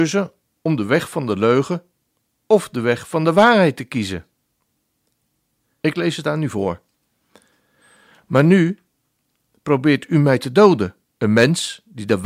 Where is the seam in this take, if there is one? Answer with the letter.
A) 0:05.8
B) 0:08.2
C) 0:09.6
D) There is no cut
A